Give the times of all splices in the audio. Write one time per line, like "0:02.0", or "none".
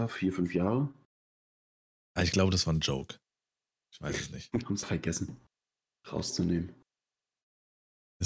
0:04.8